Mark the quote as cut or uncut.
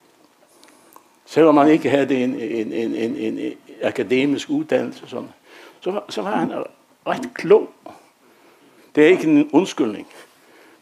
cut